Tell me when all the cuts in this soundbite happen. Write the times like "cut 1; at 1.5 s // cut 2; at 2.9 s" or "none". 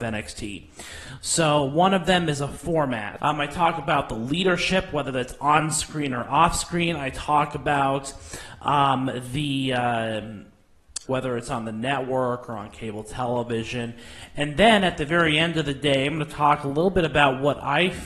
cut 1; at 3.2 s // cut 2; at 11.0 s